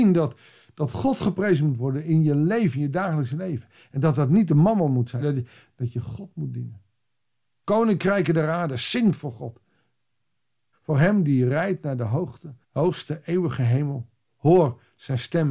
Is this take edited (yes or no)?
yes